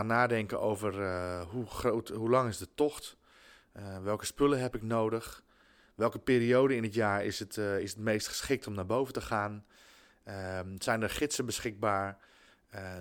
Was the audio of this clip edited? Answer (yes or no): no